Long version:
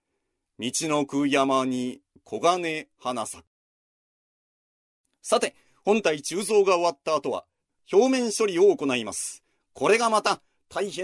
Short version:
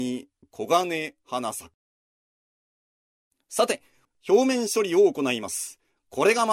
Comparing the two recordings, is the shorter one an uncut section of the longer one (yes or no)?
no